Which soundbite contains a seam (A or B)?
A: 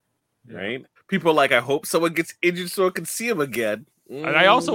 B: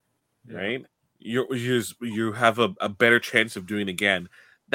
A